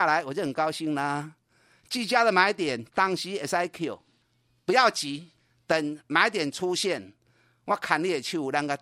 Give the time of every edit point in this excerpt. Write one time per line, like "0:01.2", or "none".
none